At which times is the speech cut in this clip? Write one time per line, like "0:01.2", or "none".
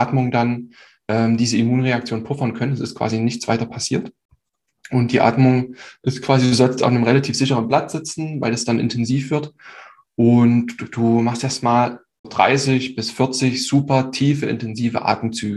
0:12.2